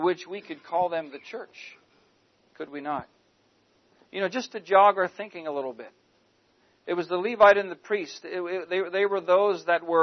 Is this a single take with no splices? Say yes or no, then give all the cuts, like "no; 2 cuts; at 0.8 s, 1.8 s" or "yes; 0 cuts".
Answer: yes; 0 cuts